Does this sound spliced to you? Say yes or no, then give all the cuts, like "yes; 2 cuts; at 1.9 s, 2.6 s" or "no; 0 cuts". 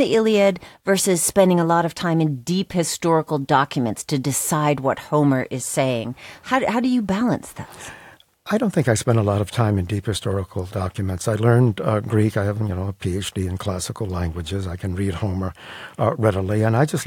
no; 0 cuts